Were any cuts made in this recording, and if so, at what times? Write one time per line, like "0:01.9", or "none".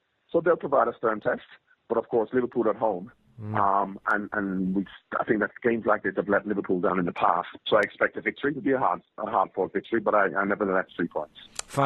0:07.6
0:10.9